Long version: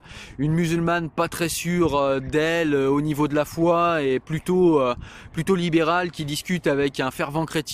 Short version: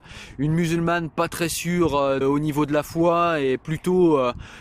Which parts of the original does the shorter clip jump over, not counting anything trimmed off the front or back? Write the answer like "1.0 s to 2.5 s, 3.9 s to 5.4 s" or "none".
2.2 s to 2.8 s